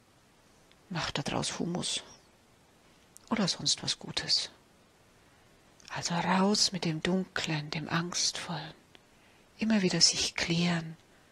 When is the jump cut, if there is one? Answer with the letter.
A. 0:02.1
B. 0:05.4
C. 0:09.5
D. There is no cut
D